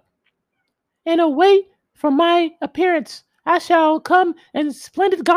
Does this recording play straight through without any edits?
yes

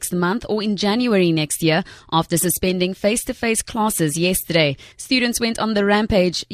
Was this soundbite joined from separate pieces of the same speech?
yes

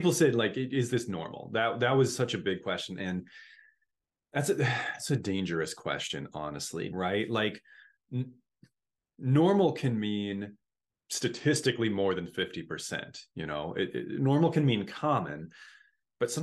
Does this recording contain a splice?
yes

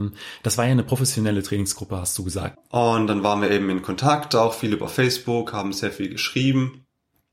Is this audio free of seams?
no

